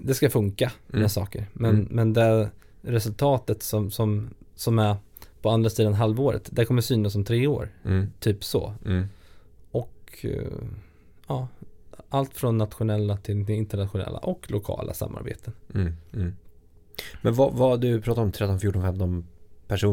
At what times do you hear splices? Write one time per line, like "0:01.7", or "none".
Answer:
0:18.3